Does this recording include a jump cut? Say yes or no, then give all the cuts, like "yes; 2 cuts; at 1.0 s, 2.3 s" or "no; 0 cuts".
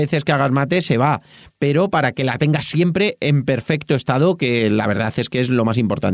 no; 0 cuts